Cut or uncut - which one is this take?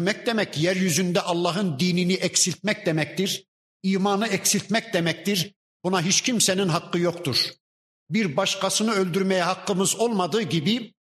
uncut